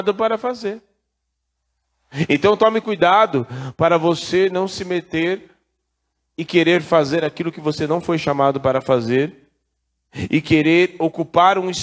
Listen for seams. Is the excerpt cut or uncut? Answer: cut